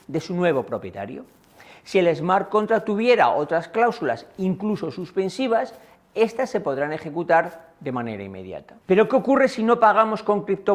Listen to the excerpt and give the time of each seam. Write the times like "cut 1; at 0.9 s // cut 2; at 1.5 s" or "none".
cut 1; at 8.8 s